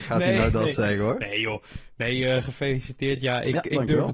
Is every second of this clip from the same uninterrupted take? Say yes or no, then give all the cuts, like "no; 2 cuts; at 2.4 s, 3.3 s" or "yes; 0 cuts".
yes; 0 cuts